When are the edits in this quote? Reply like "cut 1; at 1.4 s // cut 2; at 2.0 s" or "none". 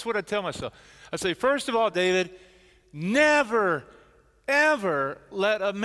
none